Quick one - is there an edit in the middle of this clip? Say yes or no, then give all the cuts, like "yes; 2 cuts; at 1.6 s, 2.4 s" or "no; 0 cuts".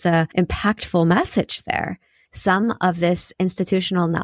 yes; 1 cut; at 2.2 s